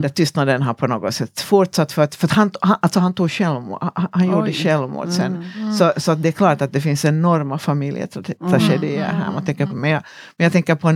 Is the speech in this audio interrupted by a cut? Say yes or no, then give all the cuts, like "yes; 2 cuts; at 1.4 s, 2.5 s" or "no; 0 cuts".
yes; 1 cut; at 9.7 s